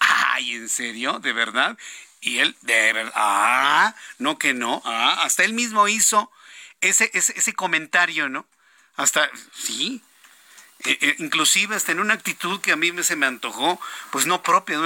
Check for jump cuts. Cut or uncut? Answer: uncut